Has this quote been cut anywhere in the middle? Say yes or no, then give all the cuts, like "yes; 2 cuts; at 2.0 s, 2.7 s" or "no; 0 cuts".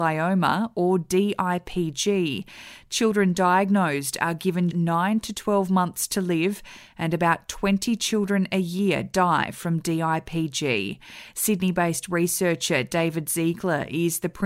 yes; 1 cut; at 4.7 s